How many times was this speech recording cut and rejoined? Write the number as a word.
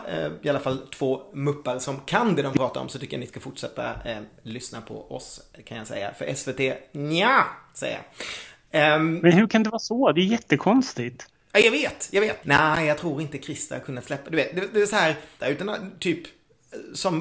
two